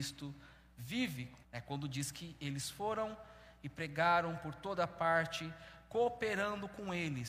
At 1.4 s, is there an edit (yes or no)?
yes